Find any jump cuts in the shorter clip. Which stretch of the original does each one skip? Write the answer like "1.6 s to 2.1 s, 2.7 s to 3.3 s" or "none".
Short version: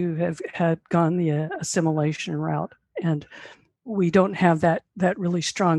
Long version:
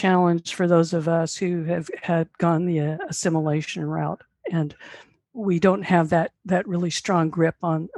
none